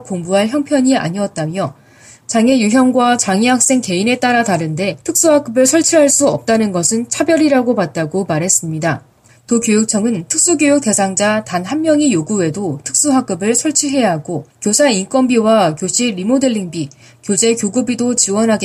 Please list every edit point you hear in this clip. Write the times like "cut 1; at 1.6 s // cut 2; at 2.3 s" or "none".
cut 1; at 5.0 s // cut 2; at 9.3 s // cut 3; at 14.5 s

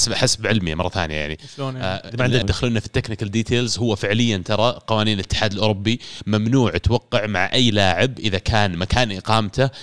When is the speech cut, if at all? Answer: cut 1; at 2.4 s

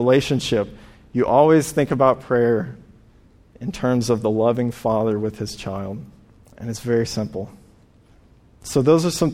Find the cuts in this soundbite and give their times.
none

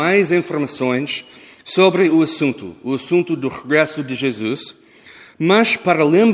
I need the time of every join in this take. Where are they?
none

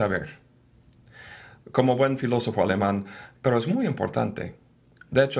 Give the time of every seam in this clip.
cut 1; at 1.6 s // cut 2; at 3.3 s

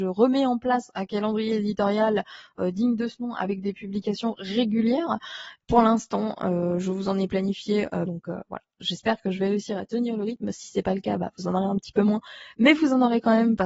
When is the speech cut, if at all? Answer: cut 1; at 5.6 s // cut 2; at 8.1 s

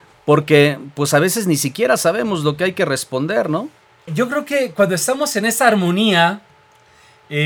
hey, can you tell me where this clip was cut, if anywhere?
cut 1; at 4.1 s

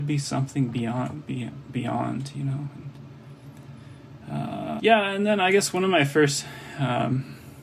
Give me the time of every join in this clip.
cut 1; at 4.8 s

